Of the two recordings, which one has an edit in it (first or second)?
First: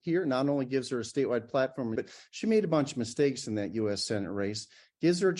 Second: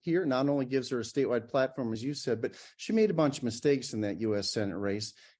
first